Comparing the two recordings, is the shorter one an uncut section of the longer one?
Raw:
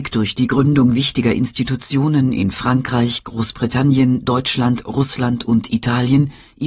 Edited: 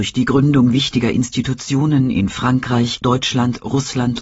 no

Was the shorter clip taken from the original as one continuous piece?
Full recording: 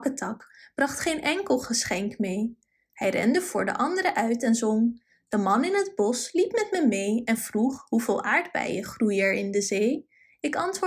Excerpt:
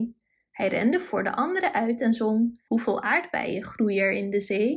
no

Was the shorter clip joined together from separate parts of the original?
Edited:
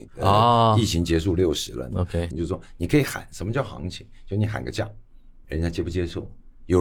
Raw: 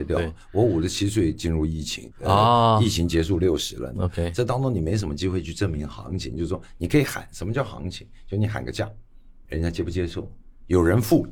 yes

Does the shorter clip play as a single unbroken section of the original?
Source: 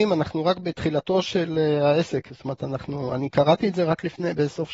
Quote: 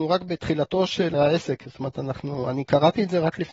no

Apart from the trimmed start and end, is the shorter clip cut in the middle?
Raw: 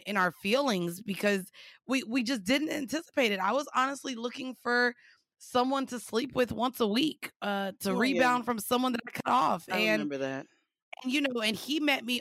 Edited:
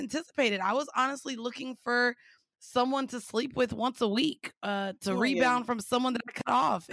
no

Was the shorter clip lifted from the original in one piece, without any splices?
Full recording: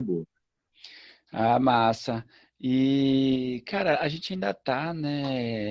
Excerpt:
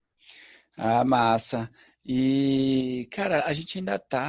yes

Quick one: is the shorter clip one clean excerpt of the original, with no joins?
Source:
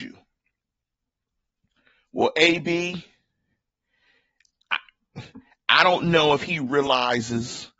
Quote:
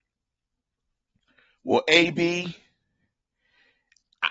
yes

